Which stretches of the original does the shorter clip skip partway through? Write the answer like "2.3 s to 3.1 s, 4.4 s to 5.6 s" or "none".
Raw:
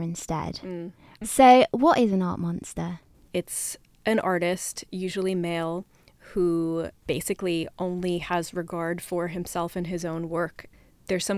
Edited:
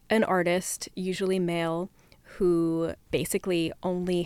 none